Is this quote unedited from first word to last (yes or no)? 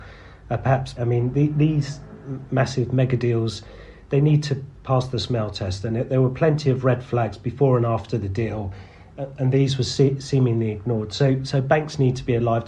no